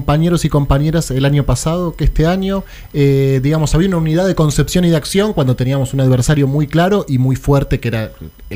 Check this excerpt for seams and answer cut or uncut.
uncut